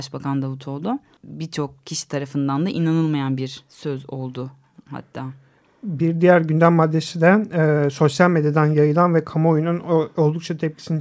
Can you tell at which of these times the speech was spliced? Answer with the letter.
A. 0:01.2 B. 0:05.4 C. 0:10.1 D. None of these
A